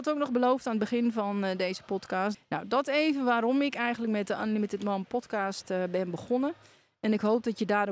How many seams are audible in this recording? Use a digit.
1